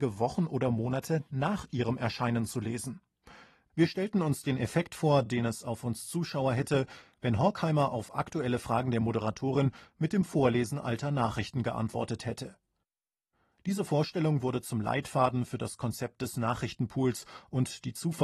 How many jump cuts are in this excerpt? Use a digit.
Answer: 0